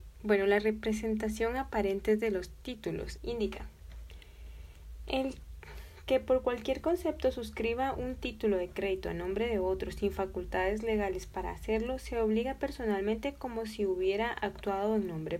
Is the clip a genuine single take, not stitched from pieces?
no; 1 cut; at 3.2 s

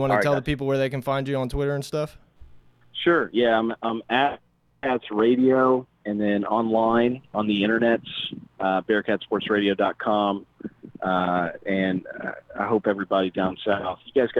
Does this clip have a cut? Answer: no; 0 cuts

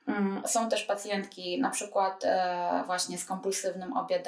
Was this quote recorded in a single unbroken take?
yes; 0 cuts

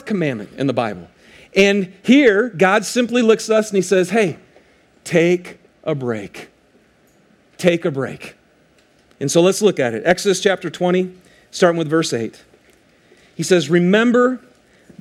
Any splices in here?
no; 0 cuts

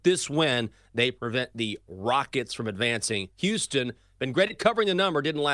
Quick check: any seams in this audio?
no; 0 cuts

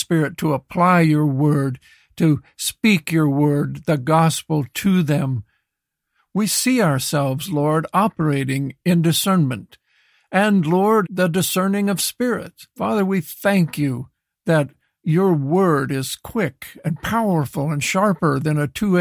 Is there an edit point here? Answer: yes; 2 cuts; at 11.0 s, 12.7 s

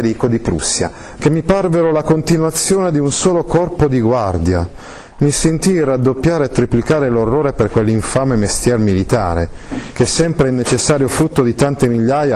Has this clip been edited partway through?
yes; 2 cuts; at 1.2 s, 9.9 s

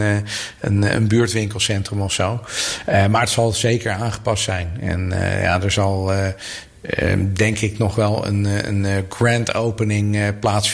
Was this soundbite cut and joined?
no; 0 cuts

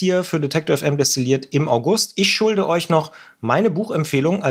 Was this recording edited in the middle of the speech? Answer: no; 0 cuts

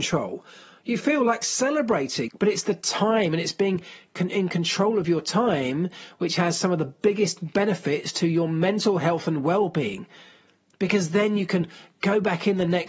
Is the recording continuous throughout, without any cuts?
no; 1 cut; at 2.3 s

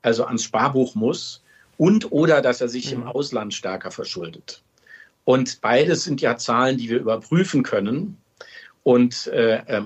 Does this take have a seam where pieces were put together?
no; 0 cuts

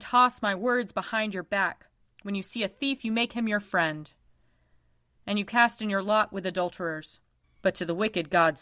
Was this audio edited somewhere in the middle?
yes; 1 cut; at 7.4 s

